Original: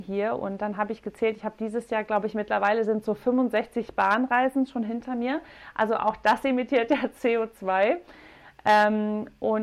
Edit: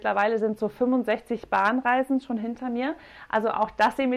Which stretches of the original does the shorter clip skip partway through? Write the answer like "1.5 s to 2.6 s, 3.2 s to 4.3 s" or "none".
none